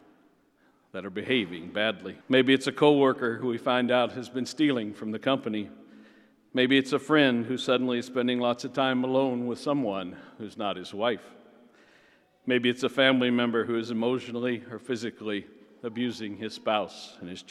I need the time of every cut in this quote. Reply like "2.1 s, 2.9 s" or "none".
2.2 s